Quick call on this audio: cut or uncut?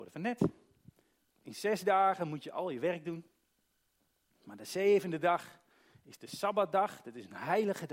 cut